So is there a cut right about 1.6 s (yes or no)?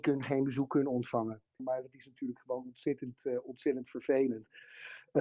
yes